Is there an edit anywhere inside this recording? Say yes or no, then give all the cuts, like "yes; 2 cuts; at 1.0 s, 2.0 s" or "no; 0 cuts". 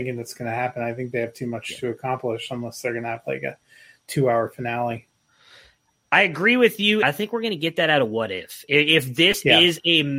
yes; 1 cut; at 7.0 s